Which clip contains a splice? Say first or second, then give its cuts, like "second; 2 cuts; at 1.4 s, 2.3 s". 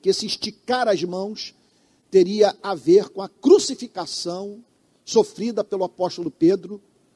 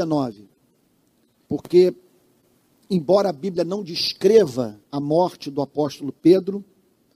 second; 2 cuts; at 1.5 s, 4.8 s